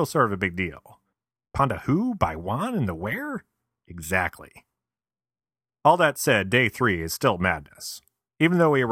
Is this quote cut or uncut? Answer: cut